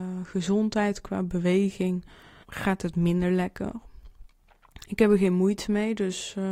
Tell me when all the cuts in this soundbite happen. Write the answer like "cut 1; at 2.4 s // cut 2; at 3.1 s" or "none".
cut 1; at 2.4 s